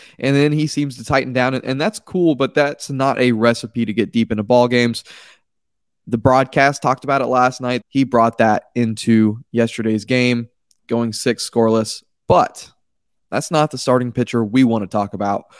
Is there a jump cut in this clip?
yes; 1 cut; at 7.8 s

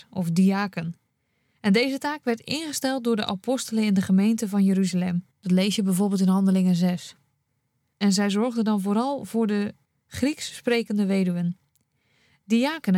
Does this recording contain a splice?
yes; 2 cuts; at 5.3 s, 7.9 s

